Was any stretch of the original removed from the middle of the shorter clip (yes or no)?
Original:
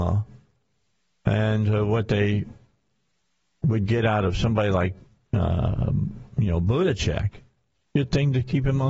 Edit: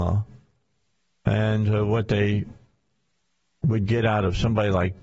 no